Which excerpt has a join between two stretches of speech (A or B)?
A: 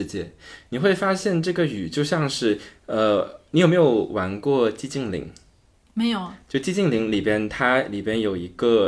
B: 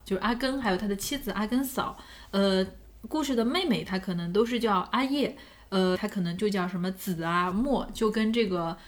B